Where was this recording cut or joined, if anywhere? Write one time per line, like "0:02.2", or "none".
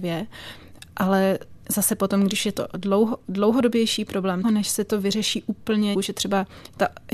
0:01.6
0:04.4
0:05.9